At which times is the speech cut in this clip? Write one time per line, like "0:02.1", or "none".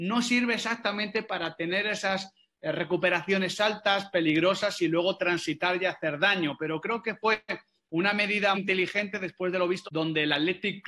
0:08.5
0:09.8